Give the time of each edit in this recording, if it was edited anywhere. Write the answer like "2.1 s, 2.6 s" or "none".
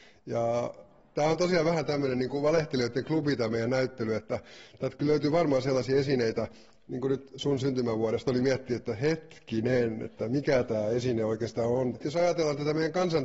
8.3 s, 11.9 s